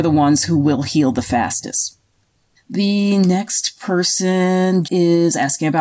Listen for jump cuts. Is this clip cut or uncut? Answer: cut